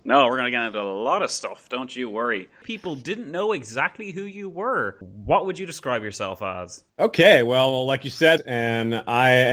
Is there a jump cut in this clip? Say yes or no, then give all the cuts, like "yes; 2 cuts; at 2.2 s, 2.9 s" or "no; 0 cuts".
yes; 2 cuts; at 6.9 s, 8.4 s